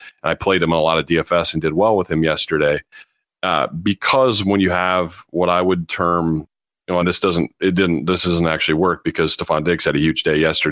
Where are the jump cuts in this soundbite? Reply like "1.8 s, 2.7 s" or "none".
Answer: 7.0 s